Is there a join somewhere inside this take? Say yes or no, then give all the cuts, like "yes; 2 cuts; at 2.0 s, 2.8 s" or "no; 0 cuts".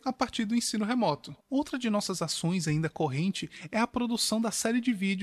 yes; 1 cut; at 1.4 s